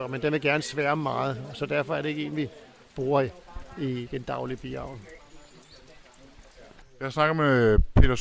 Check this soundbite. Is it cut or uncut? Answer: uncut